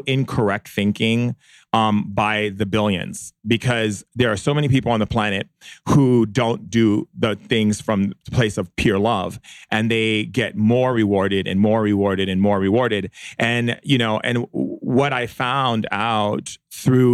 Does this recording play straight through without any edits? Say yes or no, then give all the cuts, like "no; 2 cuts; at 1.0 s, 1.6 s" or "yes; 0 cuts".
yes; 0 cuts